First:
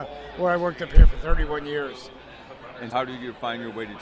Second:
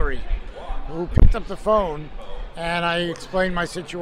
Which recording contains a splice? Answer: first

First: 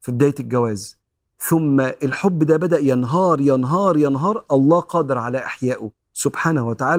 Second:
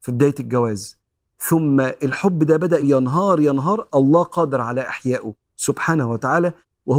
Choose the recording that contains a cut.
second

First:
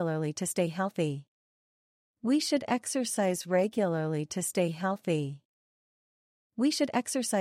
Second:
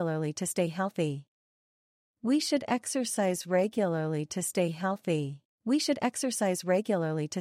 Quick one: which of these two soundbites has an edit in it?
second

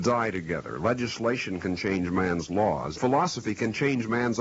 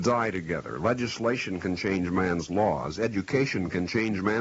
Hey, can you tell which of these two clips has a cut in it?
first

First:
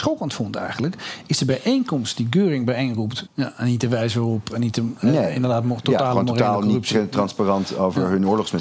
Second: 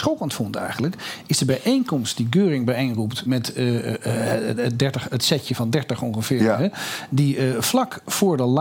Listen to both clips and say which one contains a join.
first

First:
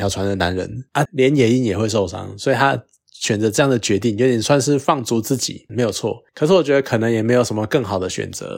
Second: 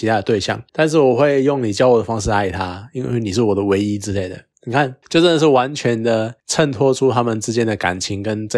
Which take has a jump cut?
first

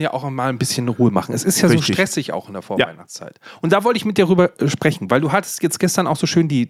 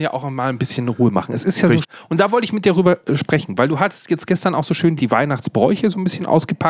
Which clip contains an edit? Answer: second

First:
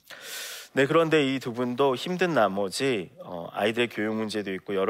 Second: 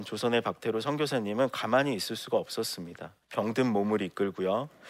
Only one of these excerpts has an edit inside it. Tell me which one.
second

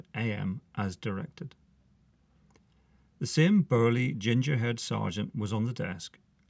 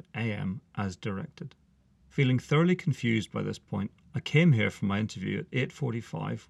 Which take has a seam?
second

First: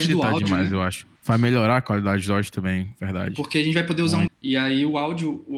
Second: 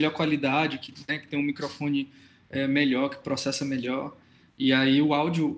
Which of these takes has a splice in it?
first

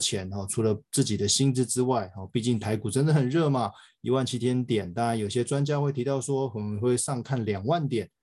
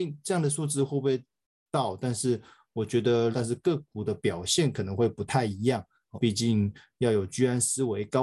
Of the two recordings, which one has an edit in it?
second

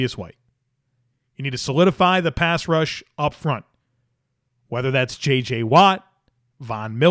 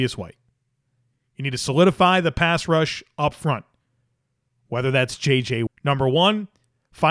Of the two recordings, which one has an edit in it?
second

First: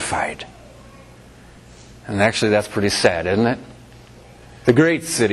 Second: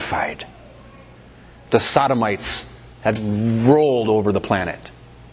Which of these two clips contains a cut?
second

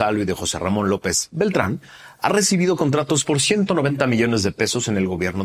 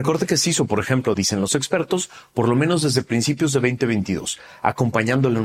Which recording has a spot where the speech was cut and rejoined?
second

